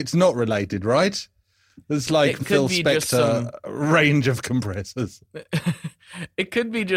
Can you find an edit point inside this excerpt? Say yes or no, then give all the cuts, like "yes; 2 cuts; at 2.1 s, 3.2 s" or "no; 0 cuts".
yes; 1 cut; at 2.4 s